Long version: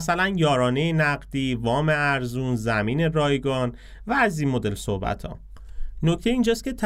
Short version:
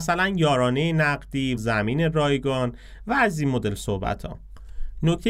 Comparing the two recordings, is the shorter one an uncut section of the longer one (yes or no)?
no